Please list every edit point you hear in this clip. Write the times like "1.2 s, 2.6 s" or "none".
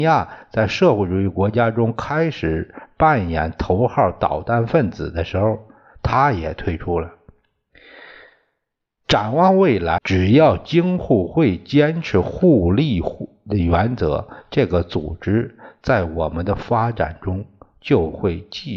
10.0 s